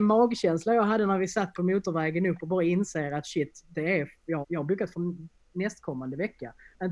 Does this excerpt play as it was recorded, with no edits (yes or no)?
no